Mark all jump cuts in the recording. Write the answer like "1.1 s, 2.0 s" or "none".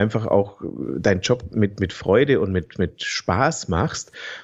none

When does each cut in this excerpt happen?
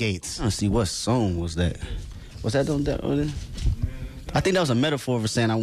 none

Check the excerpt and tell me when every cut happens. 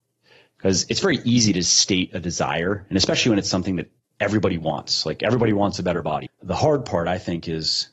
6.3 s

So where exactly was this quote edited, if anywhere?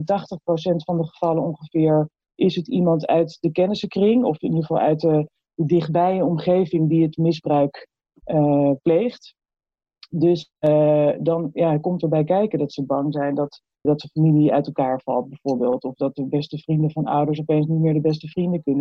13.8 s

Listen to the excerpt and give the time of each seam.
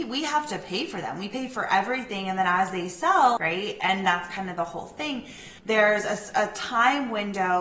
3.4 s, 5.6 s

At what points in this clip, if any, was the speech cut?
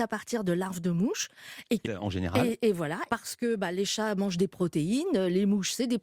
1.8 s, 3.1 s

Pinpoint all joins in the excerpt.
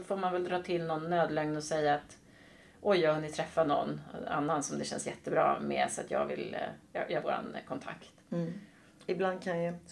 7.2 s

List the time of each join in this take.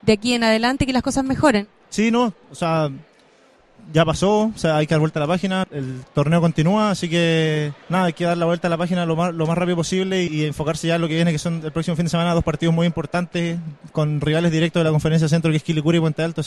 5.6 s, 7.8 s, 10.3 s

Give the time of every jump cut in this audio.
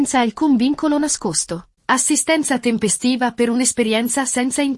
1.8 s

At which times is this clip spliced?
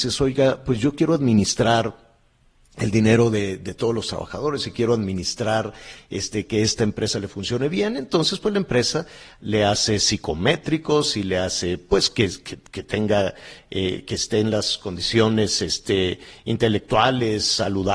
none

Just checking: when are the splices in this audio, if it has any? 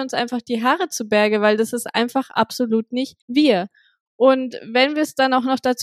3.2 s

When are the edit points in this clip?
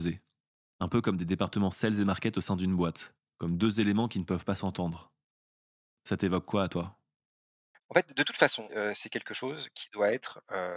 8.7 s

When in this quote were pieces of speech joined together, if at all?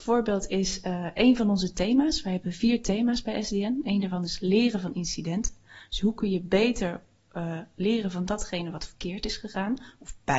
none

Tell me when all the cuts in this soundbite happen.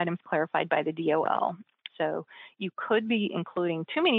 1.9 s

